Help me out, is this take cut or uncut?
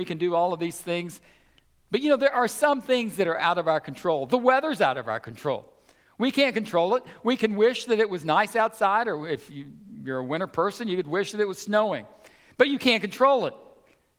uncut